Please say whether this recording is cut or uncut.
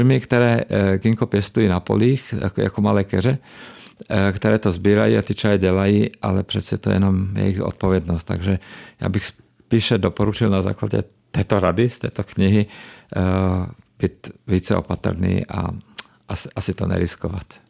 uncut